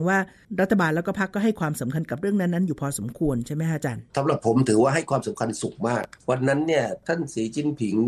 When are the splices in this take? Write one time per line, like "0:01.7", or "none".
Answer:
0:04.1